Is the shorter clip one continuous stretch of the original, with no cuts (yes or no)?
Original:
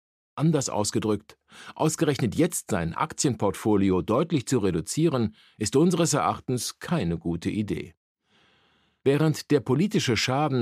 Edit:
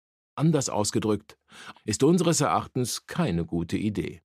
no